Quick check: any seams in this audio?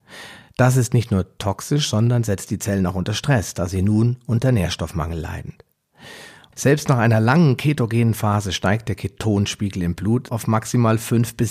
yes; 2 cuts; at 6.5 s, 10.3 s

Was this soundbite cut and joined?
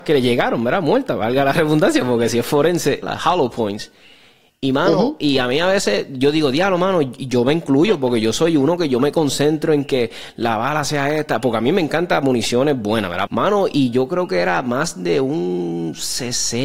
yes; 2 cuts; at 3.0 s, 13.3 s

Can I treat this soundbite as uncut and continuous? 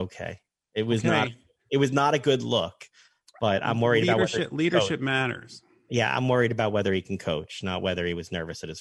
yes; 0 cuts

